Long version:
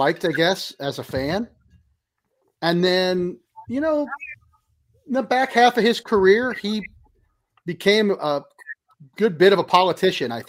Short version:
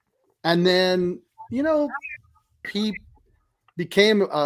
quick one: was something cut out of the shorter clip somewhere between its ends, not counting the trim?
yes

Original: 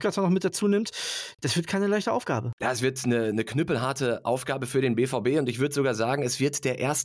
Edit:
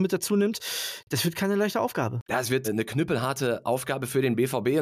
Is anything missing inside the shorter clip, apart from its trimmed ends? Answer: yes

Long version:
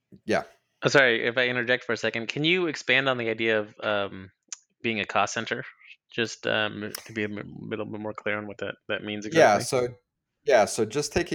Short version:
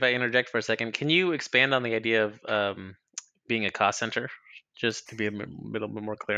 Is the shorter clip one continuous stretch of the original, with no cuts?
no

